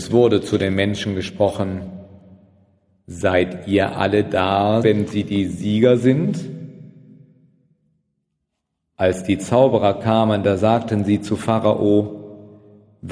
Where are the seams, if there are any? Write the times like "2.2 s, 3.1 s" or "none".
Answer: 4.8 s